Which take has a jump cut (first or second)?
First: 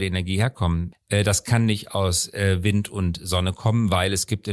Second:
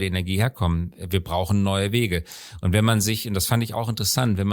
first